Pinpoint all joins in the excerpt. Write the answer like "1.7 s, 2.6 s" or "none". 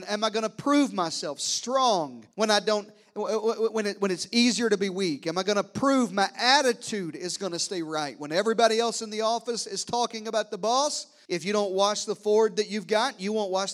2.3 s, 11.3 s